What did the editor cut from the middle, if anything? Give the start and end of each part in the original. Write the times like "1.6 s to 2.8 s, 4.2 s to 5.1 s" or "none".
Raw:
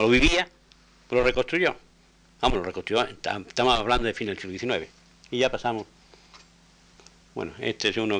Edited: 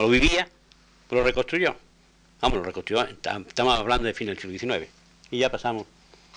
none